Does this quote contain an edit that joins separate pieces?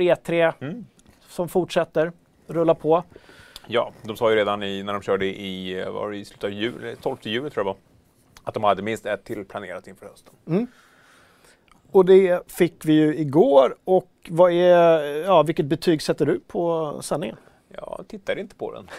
no; 0 cuts

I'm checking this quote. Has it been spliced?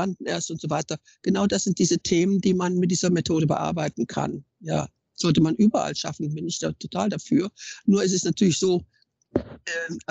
no; 0 cuts

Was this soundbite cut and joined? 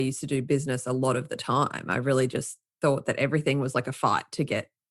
no; 0 cuts

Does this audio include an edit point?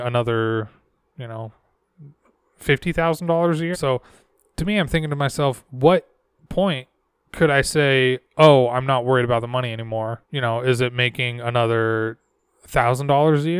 yes; 2 cuts; at 3.7 s, 10.2 s

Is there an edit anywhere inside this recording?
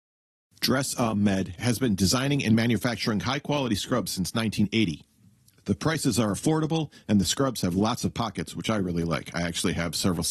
yes; 1 cut; at 7.0 s

